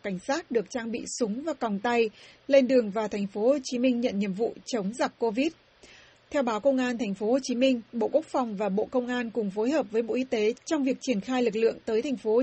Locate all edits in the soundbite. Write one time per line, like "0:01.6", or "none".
0:06.1

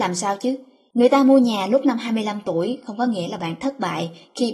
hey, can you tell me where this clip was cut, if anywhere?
0:00.9

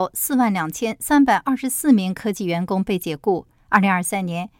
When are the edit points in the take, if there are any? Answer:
0:03.6

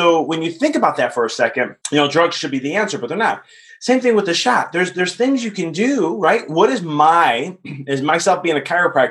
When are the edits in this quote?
0:01.8

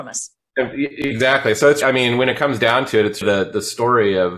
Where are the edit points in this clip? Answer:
0:01.8
0:03.2

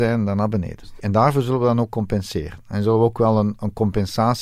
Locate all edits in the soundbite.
0:01.0

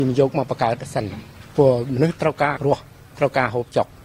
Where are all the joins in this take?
0:02.6

